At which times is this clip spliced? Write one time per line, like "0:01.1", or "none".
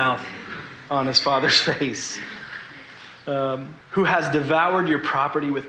0:03.8

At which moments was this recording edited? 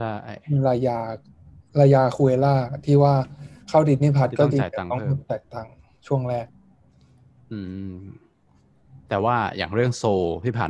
0:01.7

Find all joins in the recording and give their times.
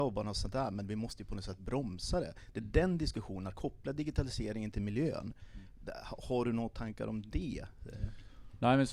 none

